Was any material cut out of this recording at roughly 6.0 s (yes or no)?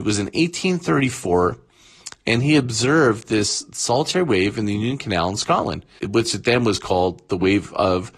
yes